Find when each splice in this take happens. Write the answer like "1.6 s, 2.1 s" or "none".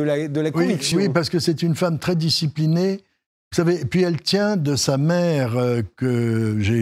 none